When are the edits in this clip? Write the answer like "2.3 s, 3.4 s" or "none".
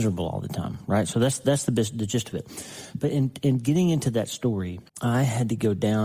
4.9 s